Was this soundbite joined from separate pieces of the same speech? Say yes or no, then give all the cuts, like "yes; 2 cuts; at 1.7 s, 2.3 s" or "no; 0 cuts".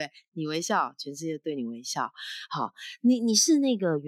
no; 0 cuts